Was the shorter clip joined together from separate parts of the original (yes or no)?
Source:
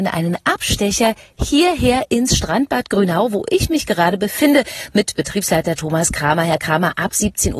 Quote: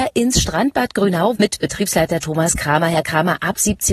yes